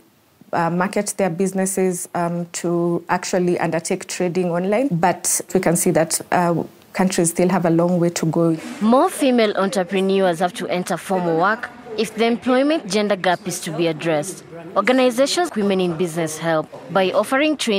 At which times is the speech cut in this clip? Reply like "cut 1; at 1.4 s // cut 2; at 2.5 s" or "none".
cut 1; at 15.5 s